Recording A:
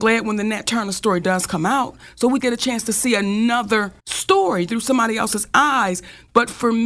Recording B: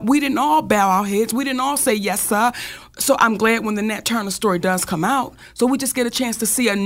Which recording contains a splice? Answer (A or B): A